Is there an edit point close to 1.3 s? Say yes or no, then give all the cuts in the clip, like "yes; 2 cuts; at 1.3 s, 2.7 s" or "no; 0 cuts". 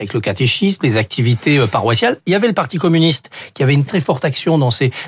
no; 1 cut; at 3.9 s